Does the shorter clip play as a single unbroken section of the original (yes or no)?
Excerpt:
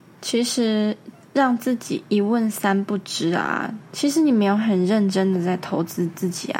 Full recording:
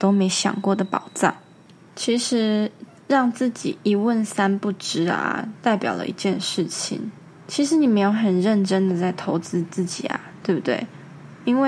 no